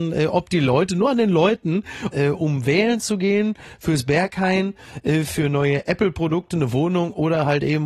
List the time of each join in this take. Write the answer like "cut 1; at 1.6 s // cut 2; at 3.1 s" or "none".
cut 1; at 2.1 s